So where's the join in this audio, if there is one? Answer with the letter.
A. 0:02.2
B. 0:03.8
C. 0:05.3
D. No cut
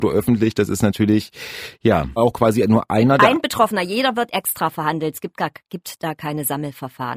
A